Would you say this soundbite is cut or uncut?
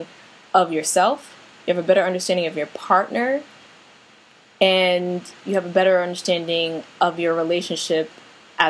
uncut